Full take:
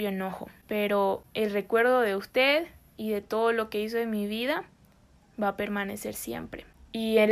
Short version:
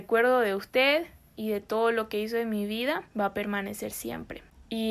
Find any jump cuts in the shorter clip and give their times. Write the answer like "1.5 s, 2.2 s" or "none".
3.1 s

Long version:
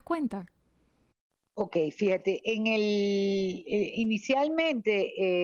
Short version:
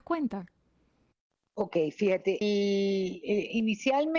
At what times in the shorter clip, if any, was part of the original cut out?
2.4 s

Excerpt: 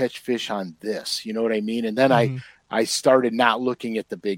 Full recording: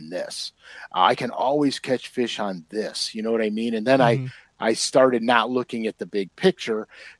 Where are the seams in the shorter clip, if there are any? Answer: none

